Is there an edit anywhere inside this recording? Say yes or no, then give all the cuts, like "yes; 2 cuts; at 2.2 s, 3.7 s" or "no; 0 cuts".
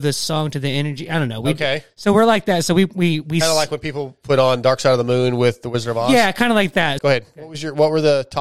yes; 1 cut; at 7.0 s